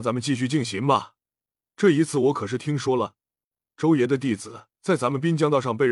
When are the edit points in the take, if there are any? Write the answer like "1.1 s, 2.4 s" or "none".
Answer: 4.7 s